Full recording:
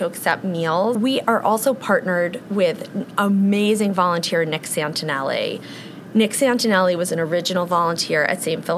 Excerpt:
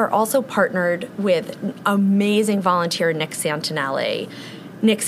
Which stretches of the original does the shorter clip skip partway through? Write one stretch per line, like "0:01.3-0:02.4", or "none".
none